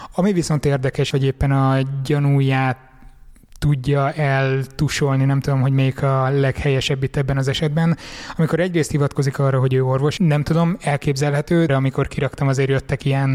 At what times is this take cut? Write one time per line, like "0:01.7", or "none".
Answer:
0:01.1
0:10.2
0:11.7